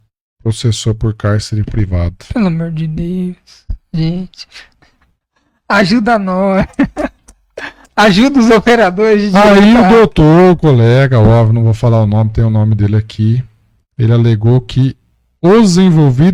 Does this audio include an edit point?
no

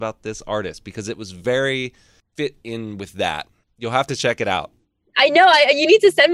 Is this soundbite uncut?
yes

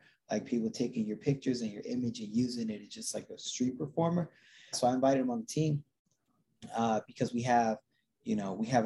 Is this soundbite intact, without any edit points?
no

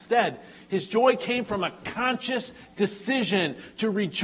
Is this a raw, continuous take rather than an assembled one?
yes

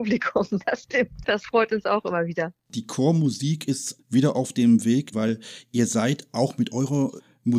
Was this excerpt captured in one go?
no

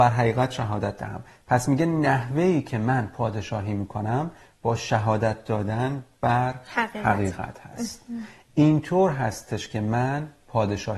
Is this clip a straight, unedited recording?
yes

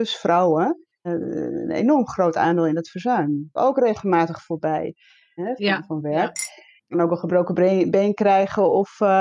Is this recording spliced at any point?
yes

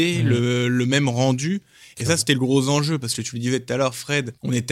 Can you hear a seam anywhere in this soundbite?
no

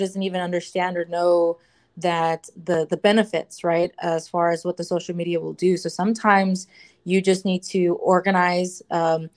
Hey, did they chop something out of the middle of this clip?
no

